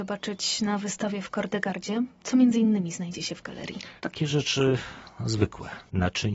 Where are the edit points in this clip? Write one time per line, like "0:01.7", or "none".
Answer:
0:04.0